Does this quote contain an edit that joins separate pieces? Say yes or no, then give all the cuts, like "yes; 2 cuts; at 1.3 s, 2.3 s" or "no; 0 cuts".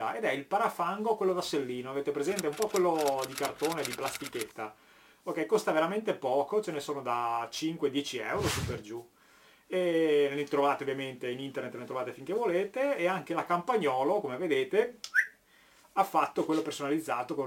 no; 0 cuts